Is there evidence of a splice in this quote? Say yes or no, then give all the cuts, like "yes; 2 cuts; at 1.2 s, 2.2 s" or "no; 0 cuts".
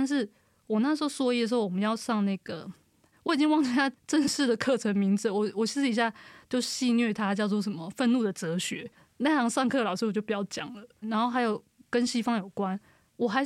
yes; 1 cut; at 11.0 s